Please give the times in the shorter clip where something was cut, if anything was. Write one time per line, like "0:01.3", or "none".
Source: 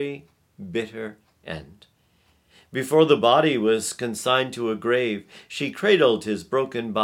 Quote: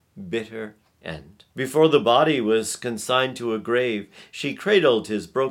0:01.5